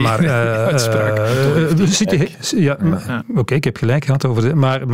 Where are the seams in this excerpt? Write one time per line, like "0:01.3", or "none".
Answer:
0:03.2